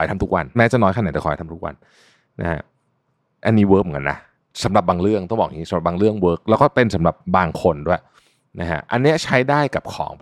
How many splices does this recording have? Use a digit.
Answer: 0